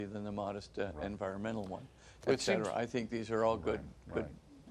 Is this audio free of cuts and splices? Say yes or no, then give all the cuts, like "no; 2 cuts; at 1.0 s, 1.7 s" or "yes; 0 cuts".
yes; 0 cuts